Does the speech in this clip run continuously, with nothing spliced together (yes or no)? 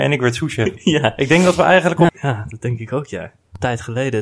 no